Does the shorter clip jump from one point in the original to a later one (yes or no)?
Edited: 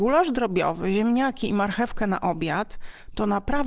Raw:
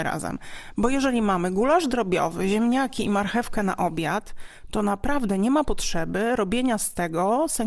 no